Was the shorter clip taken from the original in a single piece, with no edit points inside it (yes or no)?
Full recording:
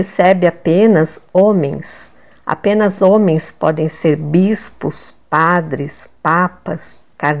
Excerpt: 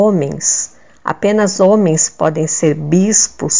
yes